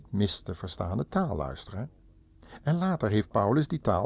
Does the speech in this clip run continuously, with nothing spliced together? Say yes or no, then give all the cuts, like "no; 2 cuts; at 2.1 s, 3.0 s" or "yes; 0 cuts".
yes; 0 cuts